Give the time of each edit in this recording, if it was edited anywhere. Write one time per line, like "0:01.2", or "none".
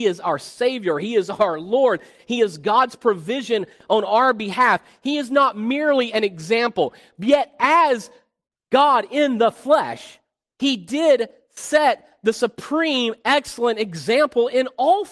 none